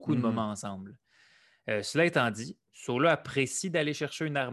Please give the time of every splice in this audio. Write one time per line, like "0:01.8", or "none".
0:02.7